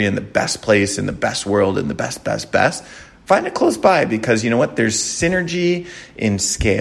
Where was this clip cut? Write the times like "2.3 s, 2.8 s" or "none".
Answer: none